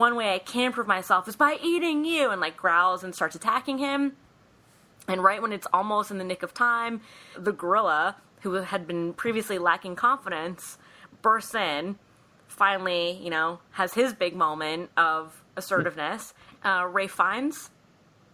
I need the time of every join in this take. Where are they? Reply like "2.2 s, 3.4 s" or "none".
7.3 s, 16.5 s

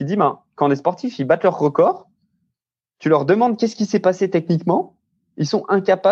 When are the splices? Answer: none

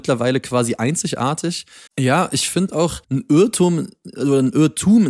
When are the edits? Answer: 1.9 s, 3.0 s

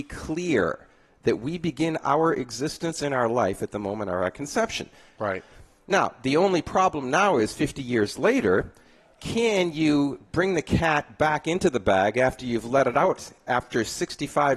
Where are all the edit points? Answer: 5.2 s

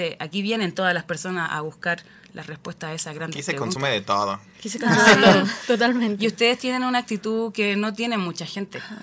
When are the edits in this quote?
none

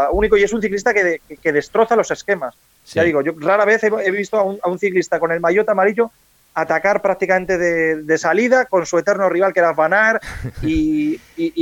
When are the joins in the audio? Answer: none

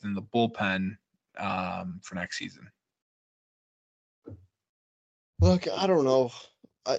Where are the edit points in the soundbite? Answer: none

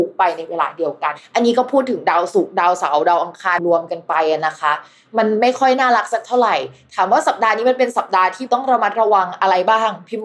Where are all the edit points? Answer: 3.6 s

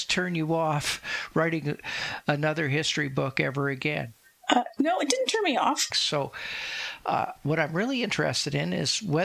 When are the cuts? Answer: 5.9 s

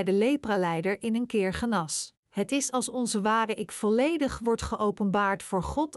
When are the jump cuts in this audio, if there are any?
2.2 s

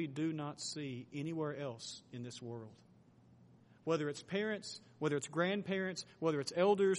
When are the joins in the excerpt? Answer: none

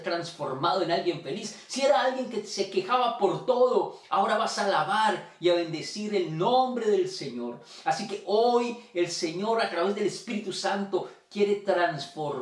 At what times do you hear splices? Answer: none

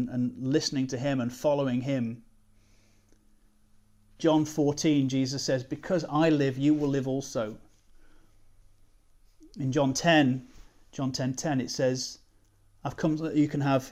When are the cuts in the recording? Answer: 4.2 s

